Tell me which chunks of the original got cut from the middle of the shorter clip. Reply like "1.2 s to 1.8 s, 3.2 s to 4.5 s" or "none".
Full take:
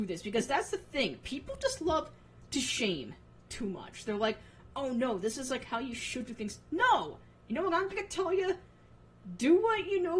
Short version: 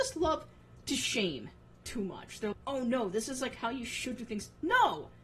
4.2 s to 4.6 s